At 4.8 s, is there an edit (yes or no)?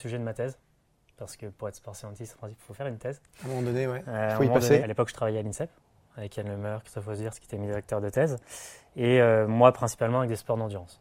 yes